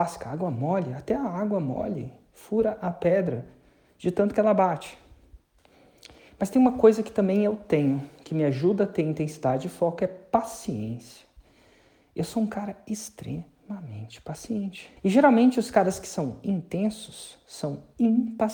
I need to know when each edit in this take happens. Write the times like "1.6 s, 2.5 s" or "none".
15.0 s